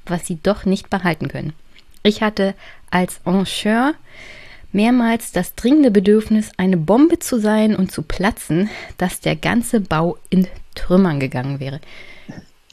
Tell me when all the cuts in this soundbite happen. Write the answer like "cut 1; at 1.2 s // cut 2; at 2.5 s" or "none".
none